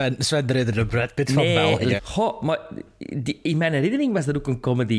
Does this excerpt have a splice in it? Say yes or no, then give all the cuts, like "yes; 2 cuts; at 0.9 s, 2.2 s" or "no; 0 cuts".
yes; 1 cut; at 2.0 s